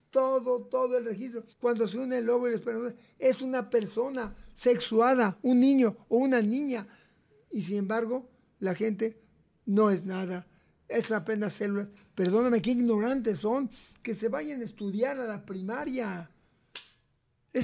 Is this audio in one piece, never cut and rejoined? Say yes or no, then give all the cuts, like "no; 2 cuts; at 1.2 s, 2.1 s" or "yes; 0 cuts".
no; 1 cut; at 1.5 s